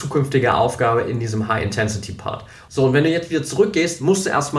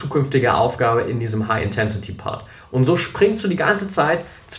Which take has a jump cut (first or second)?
first